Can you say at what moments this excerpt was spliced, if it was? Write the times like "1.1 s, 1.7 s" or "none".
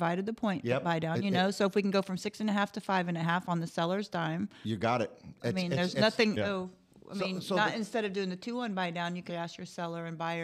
6.4 s, 9.3 s